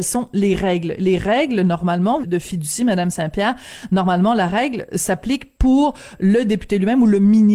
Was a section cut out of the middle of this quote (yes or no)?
yes